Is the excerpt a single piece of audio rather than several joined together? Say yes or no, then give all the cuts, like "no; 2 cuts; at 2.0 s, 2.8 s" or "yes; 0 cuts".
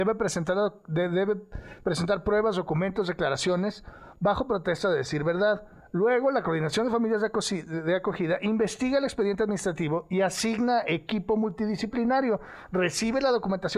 yes; 0 cuts